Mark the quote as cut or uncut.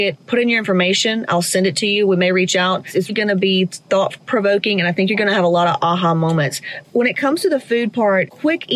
cut